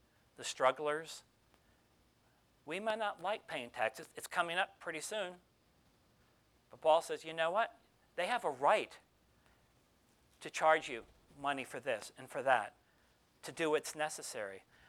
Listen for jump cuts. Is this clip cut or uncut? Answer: uncut